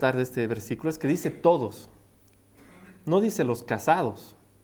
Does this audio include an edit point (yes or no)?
no